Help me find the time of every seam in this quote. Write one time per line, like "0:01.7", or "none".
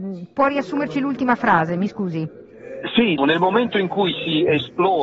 0:03.2